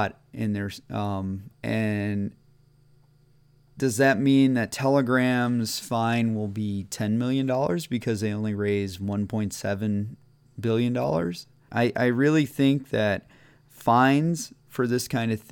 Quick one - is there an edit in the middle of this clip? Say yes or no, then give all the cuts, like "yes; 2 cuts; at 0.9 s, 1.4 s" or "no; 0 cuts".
yes; 2 cuts; at 1.5 s, 11.7 s